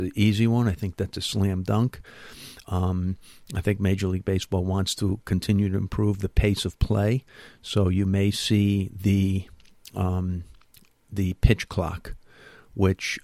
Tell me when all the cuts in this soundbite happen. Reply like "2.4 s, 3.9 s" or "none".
none